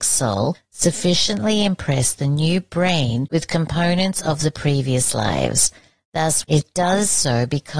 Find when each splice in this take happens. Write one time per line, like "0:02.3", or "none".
0:06.4